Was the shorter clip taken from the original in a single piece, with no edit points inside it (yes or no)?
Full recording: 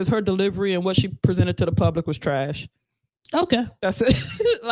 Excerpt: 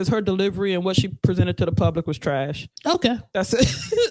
no